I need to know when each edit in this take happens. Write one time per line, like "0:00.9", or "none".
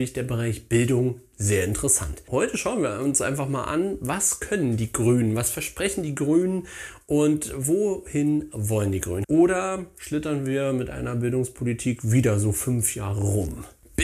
0:09.2